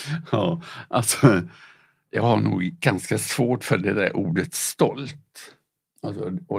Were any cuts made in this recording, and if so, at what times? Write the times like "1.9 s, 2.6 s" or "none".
none